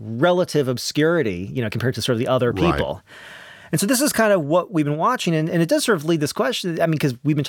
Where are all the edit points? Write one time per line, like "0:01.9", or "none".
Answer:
none